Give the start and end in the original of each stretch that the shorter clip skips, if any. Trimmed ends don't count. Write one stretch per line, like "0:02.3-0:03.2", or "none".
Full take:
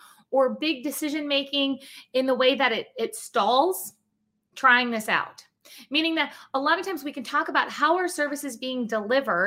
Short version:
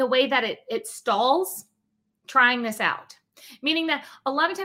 none